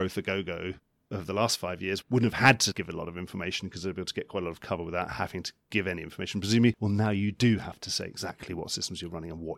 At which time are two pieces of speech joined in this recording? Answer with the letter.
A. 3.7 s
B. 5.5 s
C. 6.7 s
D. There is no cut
C